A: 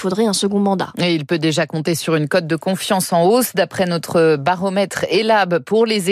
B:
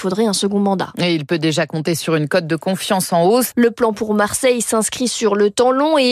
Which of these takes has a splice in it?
B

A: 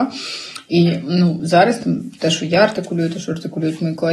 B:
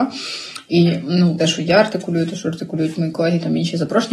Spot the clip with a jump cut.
B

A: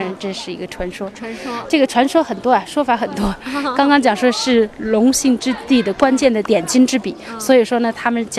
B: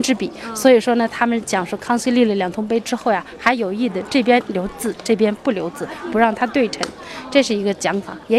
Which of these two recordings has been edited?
A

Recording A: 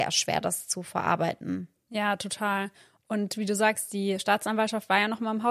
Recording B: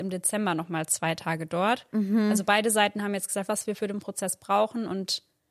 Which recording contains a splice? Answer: B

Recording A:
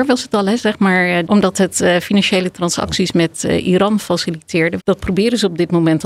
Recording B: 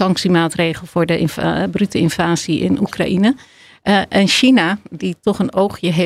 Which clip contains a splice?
A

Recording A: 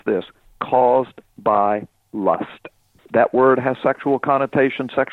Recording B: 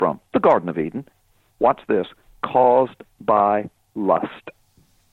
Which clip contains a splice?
A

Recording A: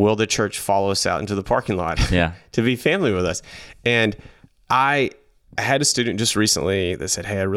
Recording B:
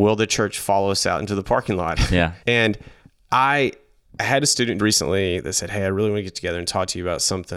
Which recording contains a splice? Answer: B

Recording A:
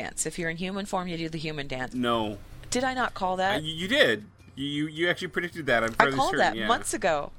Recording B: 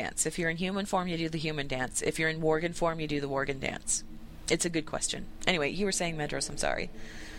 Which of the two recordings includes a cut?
A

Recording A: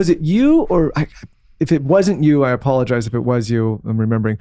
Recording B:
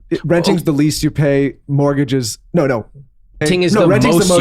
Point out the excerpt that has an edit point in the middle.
B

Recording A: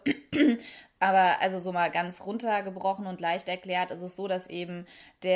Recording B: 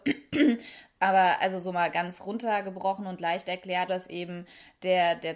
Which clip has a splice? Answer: B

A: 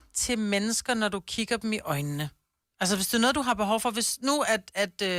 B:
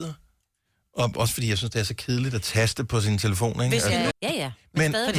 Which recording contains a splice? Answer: B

